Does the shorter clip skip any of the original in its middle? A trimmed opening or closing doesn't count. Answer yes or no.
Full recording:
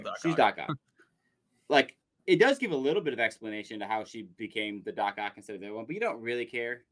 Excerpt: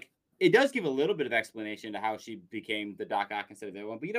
no